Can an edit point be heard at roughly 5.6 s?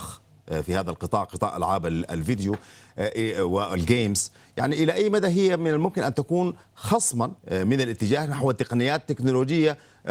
no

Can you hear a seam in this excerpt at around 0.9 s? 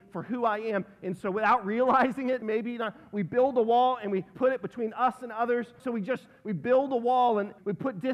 no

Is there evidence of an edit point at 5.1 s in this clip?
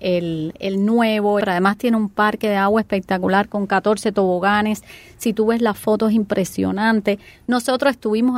no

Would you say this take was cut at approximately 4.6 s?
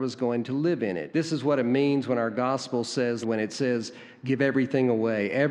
no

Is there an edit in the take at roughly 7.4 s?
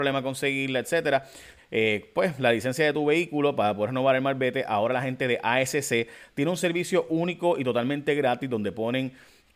no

